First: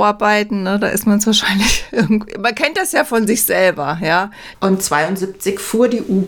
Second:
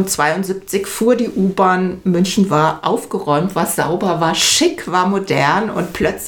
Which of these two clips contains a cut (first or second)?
first